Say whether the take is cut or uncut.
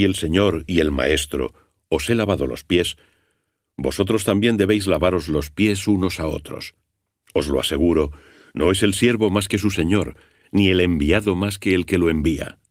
cut